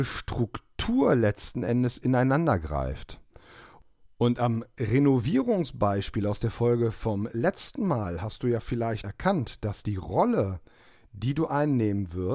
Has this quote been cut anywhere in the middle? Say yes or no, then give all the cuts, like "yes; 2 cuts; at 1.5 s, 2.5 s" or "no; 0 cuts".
yes; 1 cut; at 9.0 s